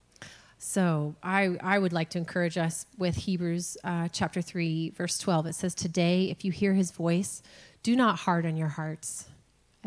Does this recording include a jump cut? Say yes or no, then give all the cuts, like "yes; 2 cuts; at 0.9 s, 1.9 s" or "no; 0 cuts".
no; 0 cuts